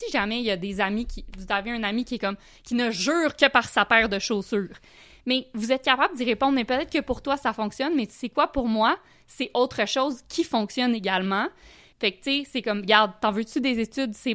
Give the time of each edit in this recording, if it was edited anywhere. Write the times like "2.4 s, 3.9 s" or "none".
11.9 s